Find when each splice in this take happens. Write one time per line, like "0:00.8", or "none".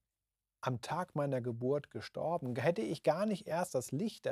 none